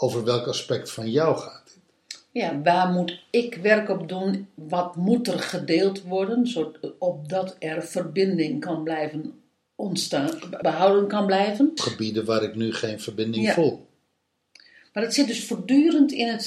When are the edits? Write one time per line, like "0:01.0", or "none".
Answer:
0:10.6
0:11.8